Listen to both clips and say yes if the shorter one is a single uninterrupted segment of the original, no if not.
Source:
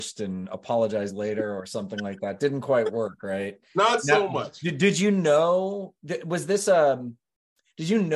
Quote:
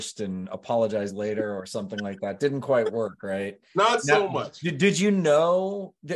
yes